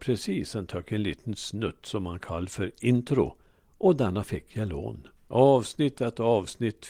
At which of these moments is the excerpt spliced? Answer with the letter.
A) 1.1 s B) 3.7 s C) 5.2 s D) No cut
C